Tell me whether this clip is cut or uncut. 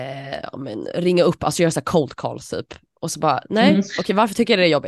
uncut